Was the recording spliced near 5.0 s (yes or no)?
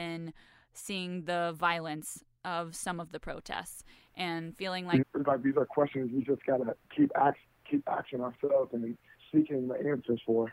yes